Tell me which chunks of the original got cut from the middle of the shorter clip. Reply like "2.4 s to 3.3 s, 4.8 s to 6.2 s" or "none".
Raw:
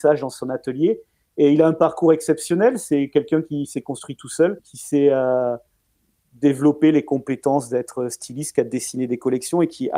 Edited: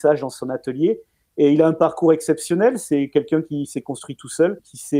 none